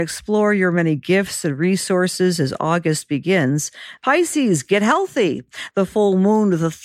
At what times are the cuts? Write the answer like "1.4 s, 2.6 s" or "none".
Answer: 4.0 s, 5.7 s